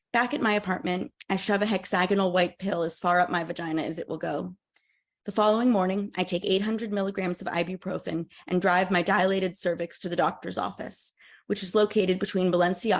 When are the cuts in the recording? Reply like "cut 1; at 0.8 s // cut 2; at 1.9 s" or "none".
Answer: none